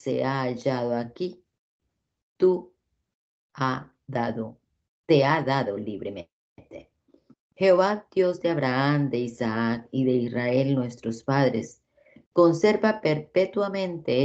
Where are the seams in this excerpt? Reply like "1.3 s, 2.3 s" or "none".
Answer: none